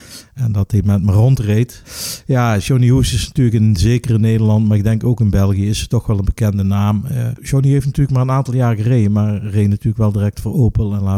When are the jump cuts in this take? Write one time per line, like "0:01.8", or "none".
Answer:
none